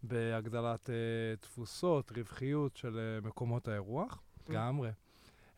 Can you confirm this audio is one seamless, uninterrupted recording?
no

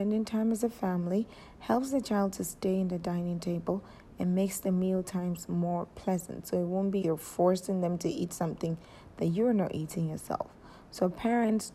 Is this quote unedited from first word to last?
no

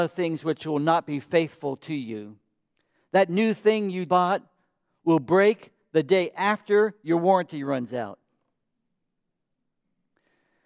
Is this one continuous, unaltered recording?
no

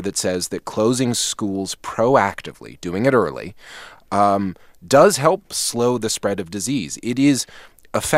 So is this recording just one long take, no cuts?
yes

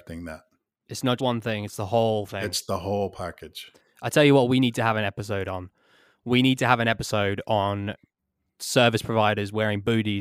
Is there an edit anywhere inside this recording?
yes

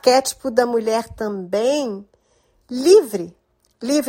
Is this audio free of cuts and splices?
yes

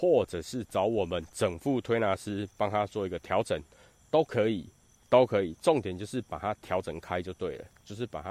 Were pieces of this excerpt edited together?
no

